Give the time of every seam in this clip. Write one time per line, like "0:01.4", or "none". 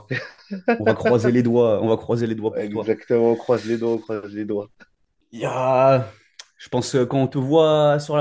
none